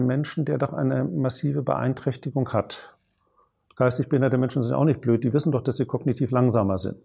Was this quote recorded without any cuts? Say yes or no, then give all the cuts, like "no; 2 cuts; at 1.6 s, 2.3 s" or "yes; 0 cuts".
yes; 0 cuts